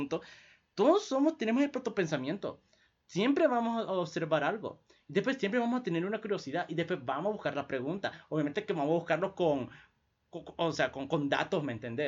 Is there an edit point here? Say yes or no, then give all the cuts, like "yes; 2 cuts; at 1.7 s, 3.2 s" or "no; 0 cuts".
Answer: no; 0 cuts